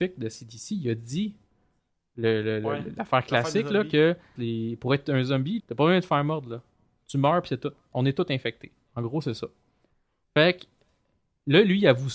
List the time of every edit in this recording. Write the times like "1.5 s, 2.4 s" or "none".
4.4 s, 5.6 s